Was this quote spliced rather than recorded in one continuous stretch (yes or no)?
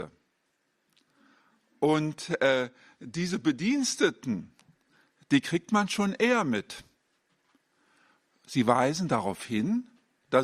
no